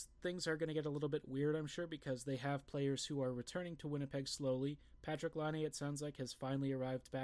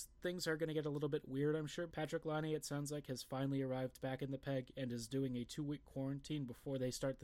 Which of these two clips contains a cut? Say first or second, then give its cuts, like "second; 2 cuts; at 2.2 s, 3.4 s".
second; 1 cut; at 1.9 s